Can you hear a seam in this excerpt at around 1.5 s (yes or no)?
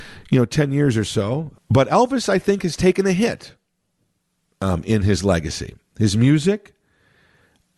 yes